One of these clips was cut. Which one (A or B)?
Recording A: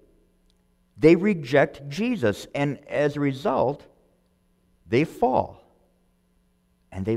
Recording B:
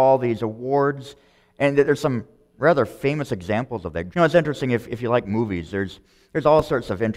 B